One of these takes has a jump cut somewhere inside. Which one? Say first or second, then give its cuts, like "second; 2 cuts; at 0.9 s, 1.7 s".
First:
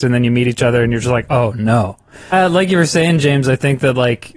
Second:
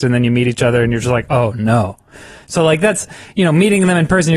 first; 1 cut; at 2.3 s